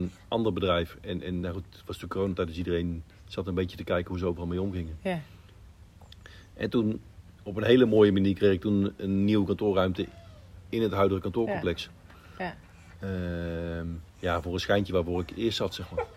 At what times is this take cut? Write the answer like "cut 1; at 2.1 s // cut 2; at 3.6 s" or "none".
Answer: cut 1; at 14.1 s